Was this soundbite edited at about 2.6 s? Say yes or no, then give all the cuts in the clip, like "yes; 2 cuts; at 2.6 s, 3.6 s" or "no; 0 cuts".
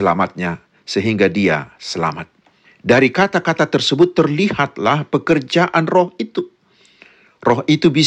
yes; 1 cut; at 2.6 s